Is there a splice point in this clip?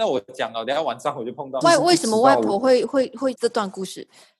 yes; 2 cuts; at 1.6 s, 3.3 s

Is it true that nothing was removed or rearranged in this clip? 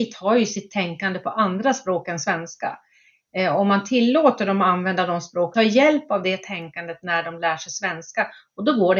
no; 1 cut; at 5.5 s

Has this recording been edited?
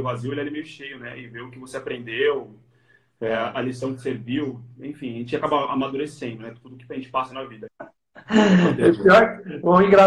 yes; 1 cut; at 7.7 s

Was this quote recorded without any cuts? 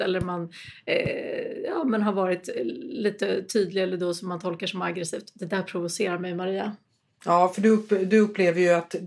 yes; 0 cuts

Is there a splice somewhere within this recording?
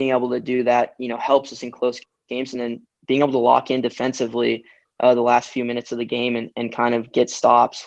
no; 0 cuts

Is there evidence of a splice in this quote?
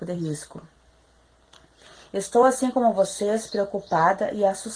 no; 0 cuts

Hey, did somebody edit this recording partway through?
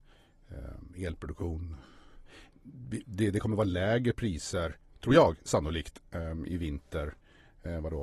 no; 0 cuts

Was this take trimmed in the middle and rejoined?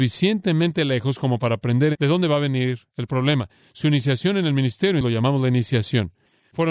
yes; 1 cut; at 5.0 s

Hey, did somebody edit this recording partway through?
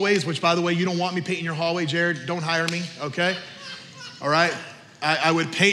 no; 0 cuts

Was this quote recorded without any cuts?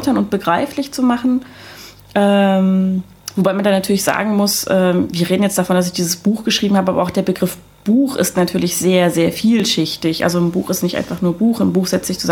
yes; 0 cuts

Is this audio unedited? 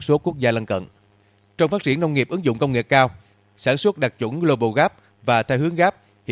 yes; 0 cuts

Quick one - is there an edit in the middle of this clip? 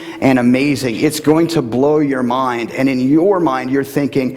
no; 0 cuts

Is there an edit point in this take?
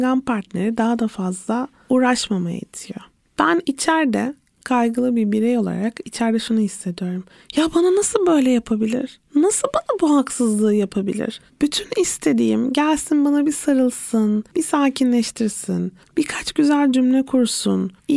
yes; 1 cut; at 14.5 s

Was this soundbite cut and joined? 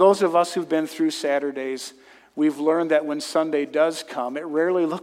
no; 0 cuts

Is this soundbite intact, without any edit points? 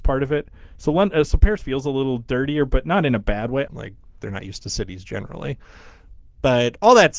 no; 1 cut; at 3.7 s

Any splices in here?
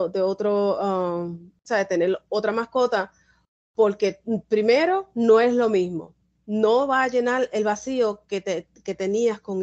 yes; 1 cut; at 1.6 s

